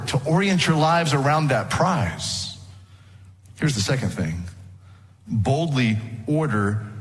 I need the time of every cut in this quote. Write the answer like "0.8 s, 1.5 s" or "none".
none